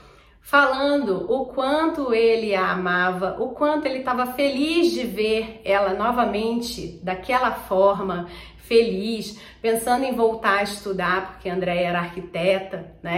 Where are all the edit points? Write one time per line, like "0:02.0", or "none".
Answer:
none

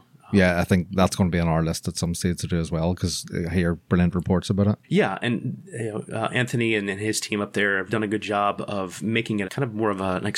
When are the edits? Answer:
0:04.8
0:07.9
0:09.4

